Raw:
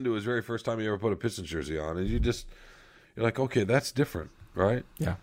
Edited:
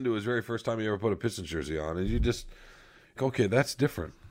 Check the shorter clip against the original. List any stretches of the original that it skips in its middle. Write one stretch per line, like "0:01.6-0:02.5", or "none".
0:03.2-0:03.3